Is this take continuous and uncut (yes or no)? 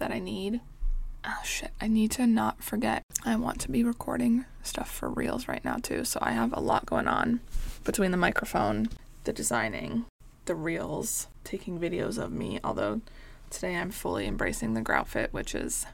yes